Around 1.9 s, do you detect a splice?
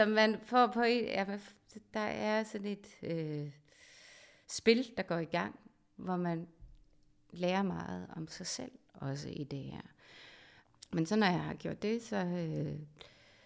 no; 0 cuts

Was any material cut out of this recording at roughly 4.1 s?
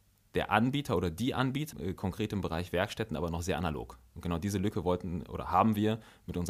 no; 1 cut; at 1.7 s

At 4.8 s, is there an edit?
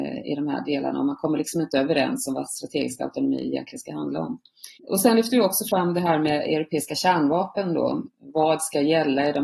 yes; 2 cuts; at 4.8 s, 8.1 s

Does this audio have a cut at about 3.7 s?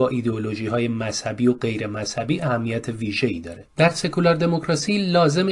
yes; 1 cut; at 3.7 s

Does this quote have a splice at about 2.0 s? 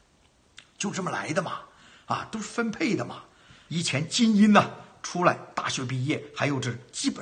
no; 1 cut; at 3.7 s

